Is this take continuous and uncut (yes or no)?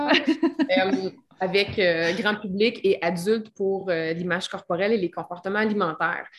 yes